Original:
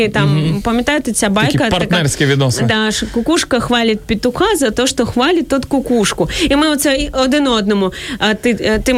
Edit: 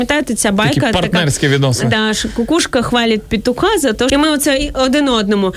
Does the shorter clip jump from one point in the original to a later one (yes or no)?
yes